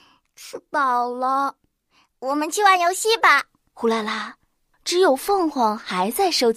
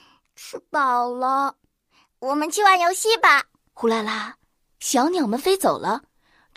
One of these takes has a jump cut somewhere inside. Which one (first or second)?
first